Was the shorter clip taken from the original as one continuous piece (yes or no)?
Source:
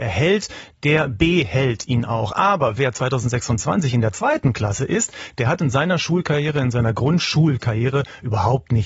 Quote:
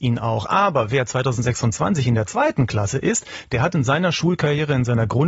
yes